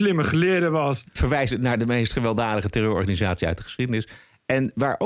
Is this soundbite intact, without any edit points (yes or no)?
no